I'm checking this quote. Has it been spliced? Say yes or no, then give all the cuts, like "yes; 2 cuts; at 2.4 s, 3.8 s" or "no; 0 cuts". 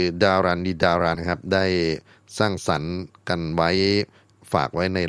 yes; 1 cut; at 1.1 s